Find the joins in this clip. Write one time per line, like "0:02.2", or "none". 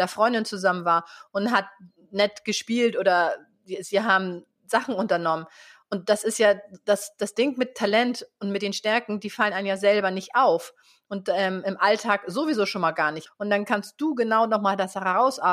0:13.3